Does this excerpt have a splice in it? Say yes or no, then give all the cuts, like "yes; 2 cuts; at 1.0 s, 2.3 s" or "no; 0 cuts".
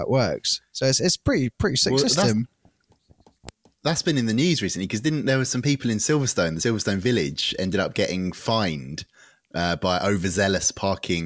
no; 0 cuts